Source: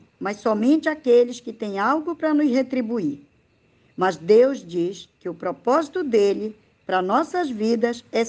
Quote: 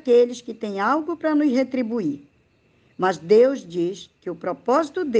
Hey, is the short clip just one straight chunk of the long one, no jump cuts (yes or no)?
yes